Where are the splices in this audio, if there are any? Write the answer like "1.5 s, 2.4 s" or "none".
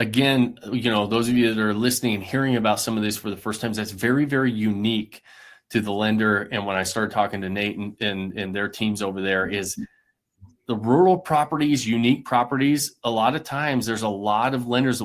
none